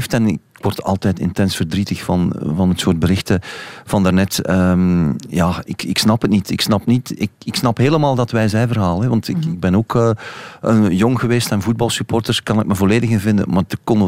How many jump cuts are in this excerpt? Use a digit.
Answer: 0